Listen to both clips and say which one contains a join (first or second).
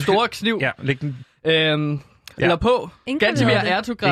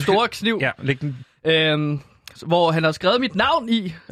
first